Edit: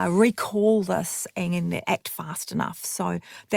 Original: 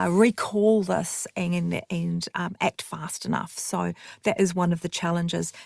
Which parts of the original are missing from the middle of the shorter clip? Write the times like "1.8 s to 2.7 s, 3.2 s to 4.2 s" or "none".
1.8 s to 2.6 s